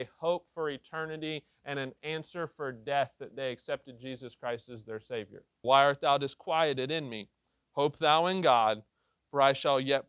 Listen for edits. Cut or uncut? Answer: cut